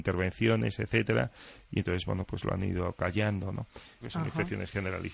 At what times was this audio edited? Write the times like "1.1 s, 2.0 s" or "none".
4.0 s